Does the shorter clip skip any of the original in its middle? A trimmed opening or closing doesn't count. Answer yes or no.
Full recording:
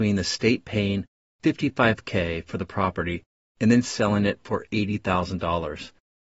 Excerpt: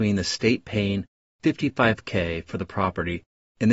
no